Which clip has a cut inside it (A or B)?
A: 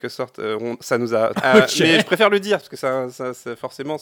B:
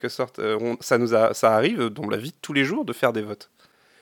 A